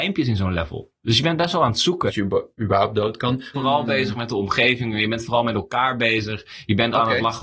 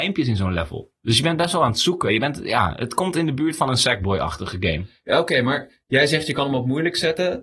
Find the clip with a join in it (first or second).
first